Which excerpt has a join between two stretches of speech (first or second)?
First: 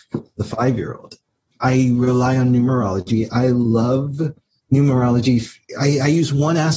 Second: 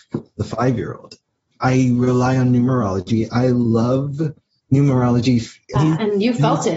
second